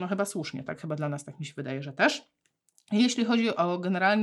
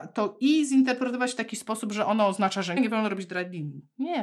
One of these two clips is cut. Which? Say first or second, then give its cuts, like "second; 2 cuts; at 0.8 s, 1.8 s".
second; 1 cut; at 2.8 s